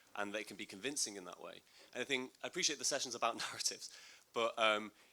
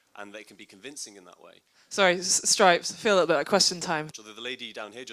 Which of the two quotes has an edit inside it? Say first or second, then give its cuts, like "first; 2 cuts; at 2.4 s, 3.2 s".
second; 2 cuts; at 1.7 s, 4.1 s